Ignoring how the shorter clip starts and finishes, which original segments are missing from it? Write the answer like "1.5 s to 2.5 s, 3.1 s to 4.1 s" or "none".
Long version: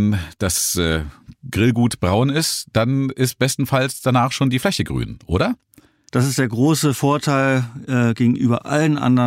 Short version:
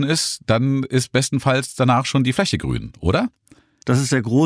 none